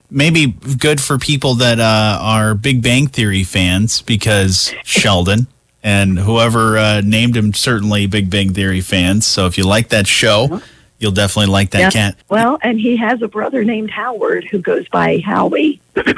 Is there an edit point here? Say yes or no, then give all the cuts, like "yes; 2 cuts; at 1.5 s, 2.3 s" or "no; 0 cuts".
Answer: yes; 1 cut; at 12.2 s